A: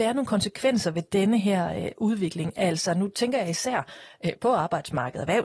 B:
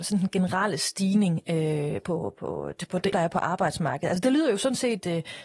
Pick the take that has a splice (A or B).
B